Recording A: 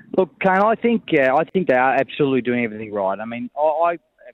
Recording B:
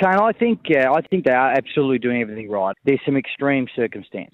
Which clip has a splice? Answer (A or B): B